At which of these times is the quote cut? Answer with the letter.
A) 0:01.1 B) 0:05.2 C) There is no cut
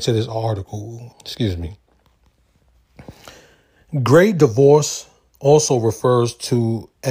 A